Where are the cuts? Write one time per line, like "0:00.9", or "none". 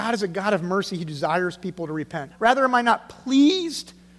0:02.3